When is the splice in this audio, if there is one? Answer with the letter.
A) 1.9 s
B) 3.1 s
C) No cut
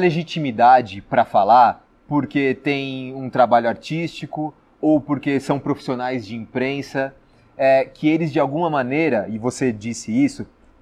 A